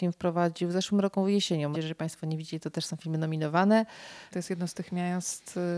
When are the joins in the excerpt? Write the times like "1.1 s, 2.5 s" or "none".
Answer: 1.7 s, 4.3 s